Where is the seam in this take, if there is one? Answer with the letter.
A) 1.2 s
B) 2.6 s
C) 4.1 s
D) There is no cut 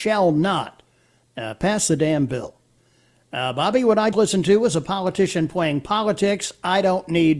C